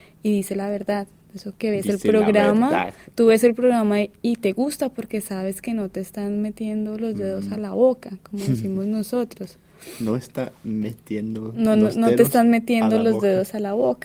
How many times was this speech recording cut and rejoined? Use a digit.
0